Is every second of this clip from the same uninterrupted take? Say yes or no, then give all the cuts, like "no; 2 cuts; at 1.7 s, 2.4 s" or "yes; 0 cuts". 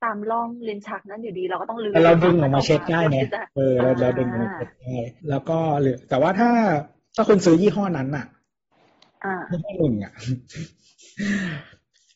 no; 2 cuts; at 3.5 s, 5.2 s